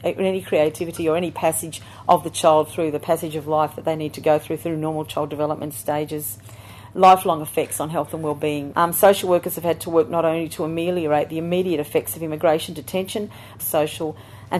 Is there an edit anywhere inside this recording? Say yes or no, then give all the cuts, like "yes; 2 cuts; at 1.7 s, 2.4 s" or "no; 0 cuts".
yes; 2 cuts; at 8.7 s, 13.6 s